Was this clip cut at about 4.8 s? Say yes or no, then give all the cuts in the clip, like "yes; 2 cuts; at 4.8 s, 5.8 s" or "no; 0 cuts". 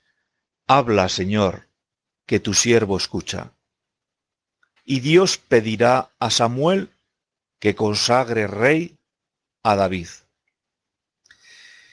yes; 1 cut; at 4.8 s